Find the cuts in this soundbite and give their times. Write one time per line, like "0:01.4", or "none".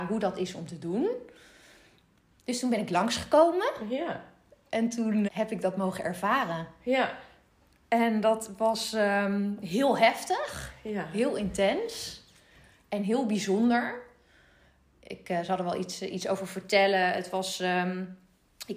0:05.3